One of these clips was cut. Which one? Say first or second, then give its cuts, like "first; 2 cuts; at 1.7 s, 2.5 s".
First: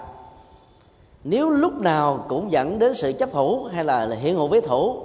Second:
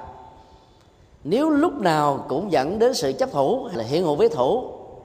second; 1 cut; at 3.7 s